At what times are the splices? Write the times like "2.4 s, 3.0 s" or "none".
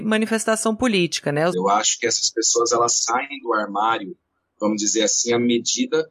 1.5 s